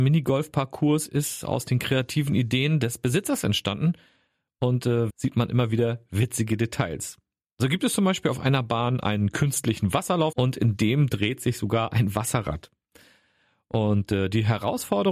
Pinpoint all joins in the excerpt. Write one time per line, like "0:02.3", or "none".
0:05.1
0:10.3